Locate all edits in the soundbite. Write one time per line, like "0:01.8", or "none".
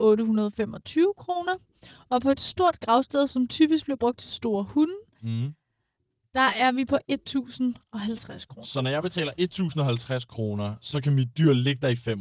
none